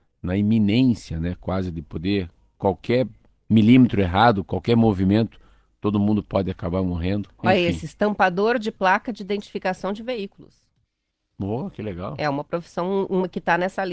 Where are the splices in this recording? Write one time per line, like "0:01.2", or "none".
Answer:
none